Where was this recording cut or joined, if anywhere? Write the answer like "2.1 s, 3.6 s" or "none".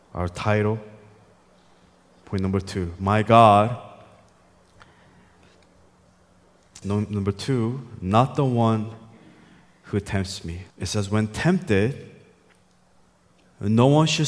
6.8 s, 10.7 s